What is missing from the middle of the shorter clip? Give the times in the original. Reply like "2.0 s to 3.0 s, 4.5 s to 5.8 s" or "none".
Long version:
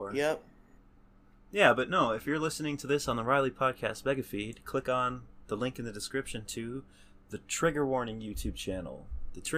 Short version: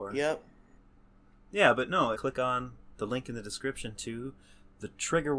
2.1 s to 4.6 s